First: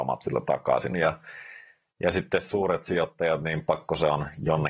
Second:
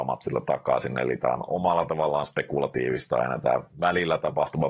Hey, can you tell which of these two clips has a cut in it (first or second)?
first